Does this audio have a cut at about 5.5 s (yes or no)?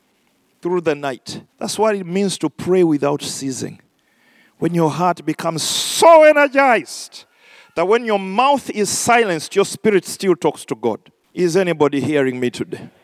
no